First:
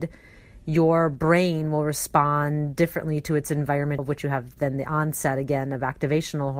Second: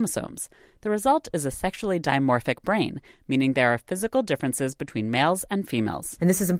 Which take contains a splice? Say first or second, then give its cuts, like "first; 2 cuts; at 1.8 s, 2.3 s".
first; 1 cut; at 4.0 s